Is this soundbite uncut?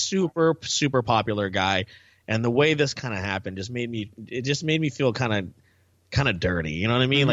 yes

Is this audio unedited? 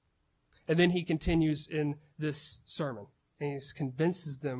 no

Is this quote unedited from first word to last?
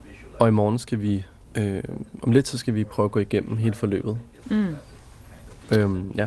no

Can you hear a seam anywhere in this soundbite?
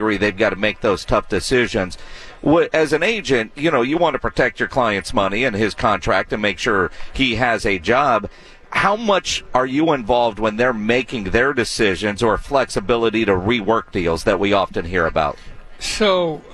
no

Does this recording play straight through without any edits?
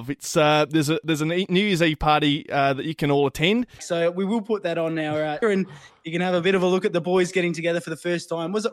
no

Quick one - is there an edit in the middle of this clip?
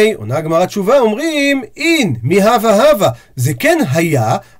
no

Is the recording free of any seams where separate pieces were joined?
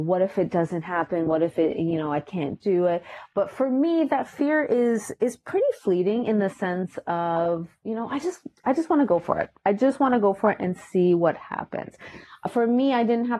yes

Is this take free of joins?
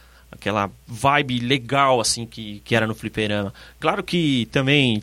yes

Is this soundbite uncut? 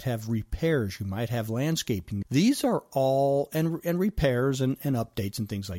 no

